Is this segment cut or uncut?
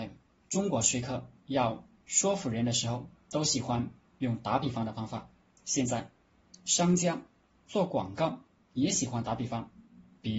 uncut